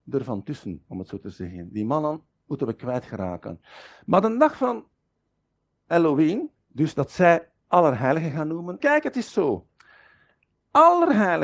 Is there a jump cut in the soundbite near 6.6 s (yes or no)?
yes